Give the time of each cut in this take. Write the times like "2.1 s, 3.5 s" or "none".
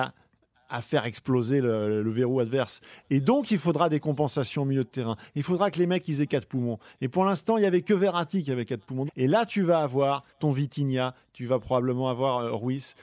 9.1 s, 10.3 s